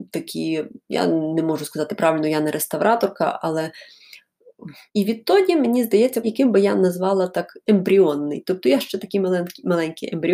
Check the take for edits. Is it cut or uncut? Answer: cut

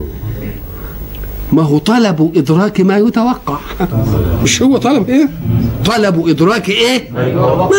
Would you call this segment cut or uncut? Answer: uncut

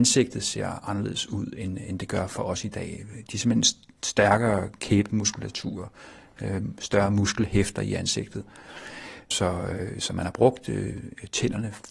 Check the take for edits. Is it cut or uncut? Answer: uncut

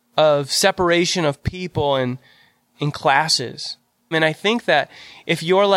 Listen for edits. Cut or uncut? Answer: cut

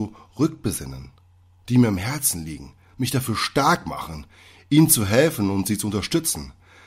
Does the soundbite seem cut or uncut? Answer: uncut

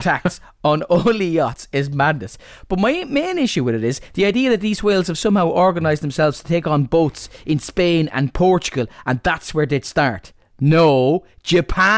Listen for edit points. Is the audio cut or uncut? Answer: uncut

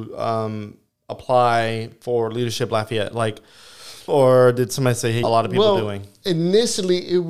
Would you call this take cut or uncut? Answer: cut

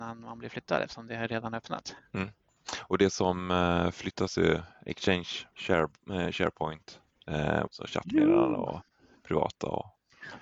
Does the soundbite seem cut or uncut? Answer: cut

